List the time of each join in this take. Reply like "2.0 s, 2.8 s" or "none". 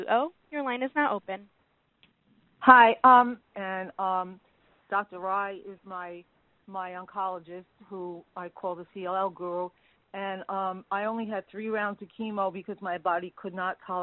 3.5 s